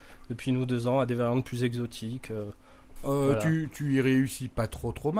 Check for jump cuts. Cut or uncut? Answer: cut